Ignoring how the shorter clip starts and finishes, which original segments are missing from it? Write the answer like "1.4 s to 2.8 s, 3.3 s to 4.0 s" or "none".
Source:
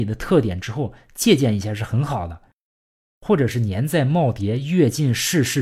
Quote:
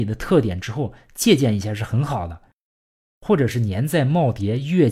none